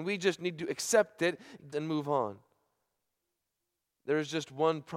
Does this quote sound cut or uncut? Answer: cut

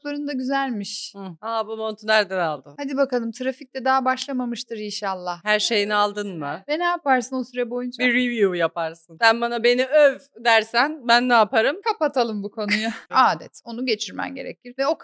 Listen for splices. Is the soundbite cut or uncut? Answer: cut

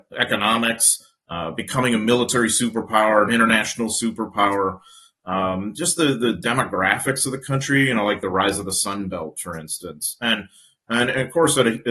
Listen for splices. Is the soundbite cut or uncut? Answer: uncut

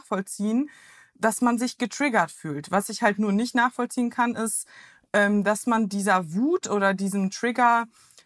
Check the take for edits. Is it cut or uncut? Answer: uncut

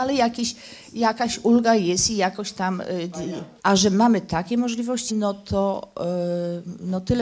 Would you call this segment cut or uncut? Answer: cut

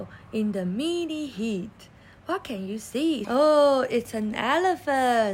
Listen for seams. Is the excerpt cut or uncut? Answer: cut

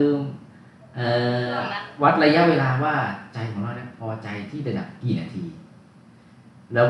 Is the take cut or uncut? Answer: uncut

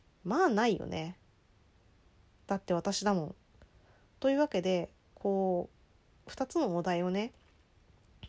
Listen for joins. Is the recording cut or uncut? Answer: uncut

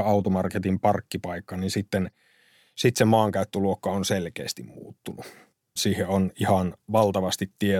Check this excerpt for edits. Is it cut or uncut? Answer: cut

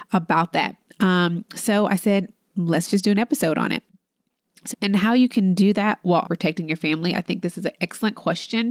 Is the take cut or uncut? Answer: cut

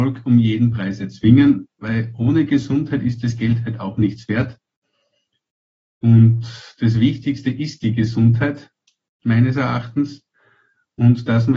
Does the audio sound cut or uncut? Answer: uncut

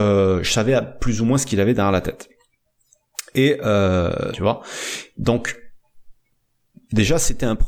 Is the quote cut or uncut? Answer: cut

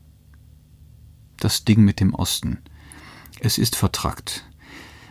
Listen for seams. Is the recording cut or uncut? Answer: uncut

